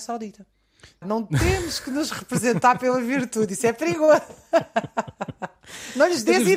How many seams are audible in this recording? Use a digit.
1